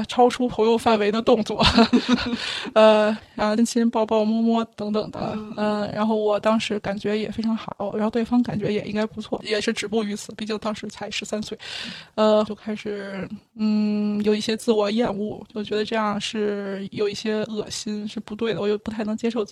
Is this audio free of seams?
no; 2 cuts; at 3.6 s, 12.5 s

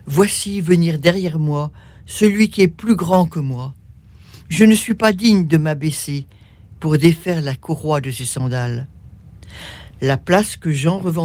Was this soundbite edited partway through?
no; 0 cuts

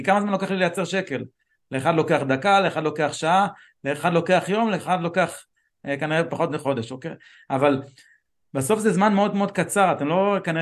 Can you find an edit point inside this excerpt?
no; 0 cuts

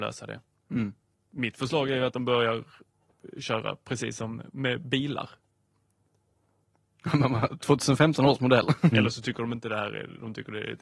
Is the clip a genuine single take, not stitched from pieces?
no; 1 cut; at 8.9 s

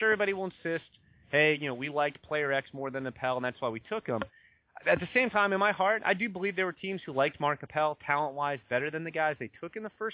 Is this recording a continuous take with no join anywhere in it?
yes; 0 cuts

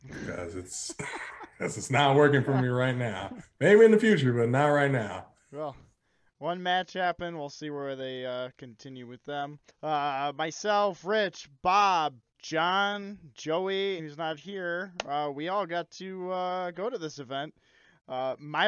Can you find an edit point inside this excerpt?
yes; 3 cuts; at 9.7 s, 12.3 s, 14.0 s

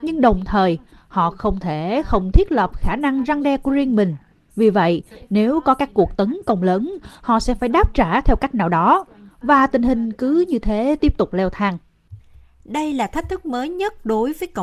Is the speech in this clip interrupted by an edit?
no; 0 cuts

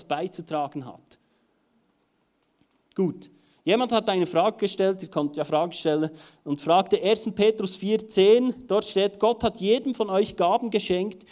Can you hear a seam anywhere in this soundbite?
no; 0 cuts

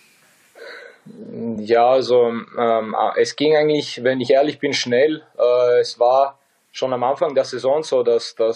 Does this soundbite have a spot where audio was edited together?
no; 0 cuts

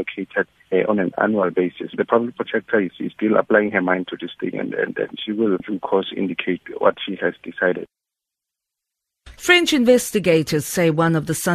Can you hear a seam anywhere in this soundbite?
yes; 1 cut; at 9.4 s

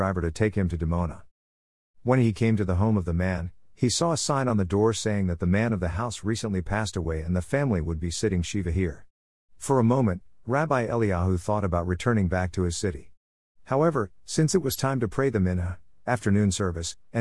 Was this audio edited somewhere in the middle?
no; 0 cuts

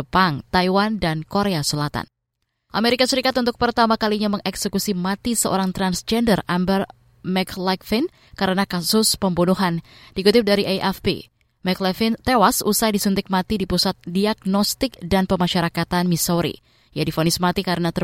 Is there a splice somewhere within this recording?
no; 0 cuts

